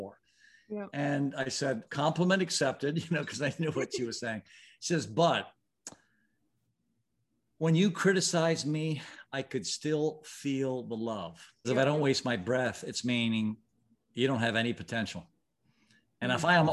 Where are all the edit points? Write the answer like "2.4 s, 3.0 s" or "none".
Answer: 1.9 s, 11.6 s